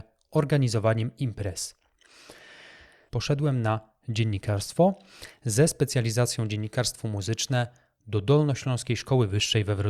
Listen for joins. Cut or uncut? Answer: cut